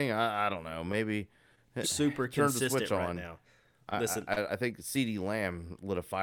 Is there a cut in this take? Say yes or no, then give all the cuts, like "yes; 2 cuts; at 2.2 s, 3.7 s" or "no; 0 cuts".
yes; 2 cuts; at 1.8 s, 4.5 s